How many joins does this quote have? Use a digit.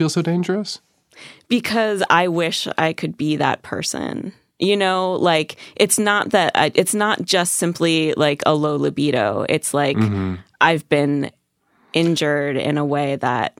0